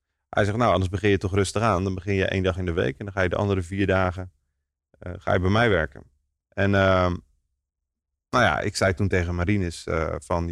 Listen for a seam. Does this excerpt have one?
no; 0 cuts

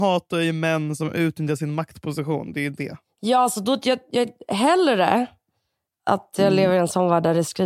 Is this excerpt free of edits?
yes; 0 cuts

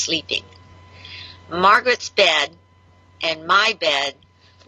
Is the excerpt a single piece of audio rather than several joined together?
yes; 0 cuts

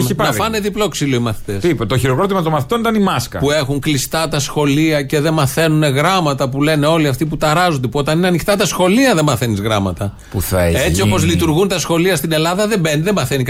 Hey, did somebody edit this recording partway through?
no; 0 cuts

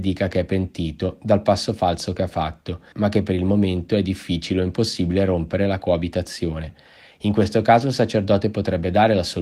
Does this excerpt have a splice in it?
yes; 1 cut; at 2.9 s

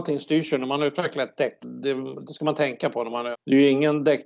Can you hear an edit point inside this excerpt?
yes; 2 cuts; at 1.6 s, 3.3 s

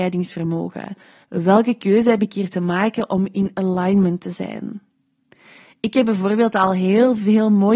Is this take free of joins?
no; 1 cut; at 1.2 s

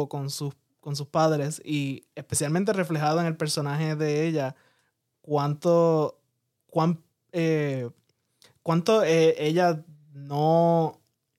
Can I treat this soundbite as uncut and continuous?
yes; 0 cuts

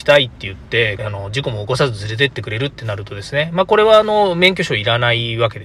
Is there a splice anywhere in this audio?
yes; 1 cut; at 1.0 s

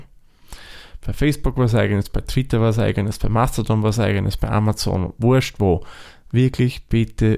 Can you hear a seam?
no; 0 cuts

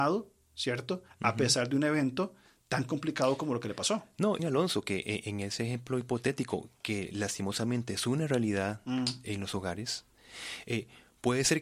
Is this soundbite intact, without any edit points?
no; 1 cut; at 4.4 s

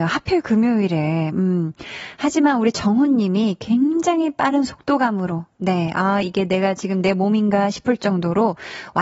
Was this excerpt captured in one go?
no; 1 cut; at 6.2 s

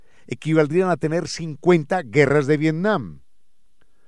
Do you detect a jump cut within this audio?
no; 0 cuts

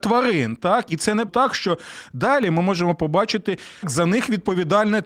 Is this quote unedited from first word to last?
no; 2 cuts; at 1.3 s, 3.8 s

